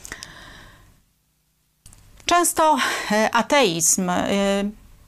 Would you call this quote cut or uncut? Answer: uncut